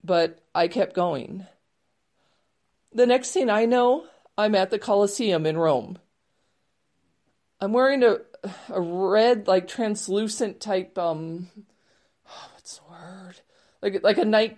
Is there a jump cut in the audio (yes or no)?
yes